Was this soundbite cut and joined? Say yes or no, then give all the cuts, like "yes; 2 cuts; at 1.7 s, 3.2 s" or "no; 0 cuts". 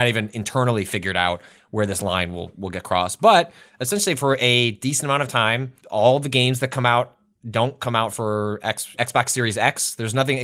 yes; 2 cuts; at 5.8 s, 8.9 s